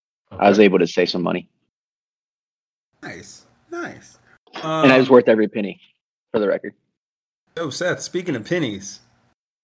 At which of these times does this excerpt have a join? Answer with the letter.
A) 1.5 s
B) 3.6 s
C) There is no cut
C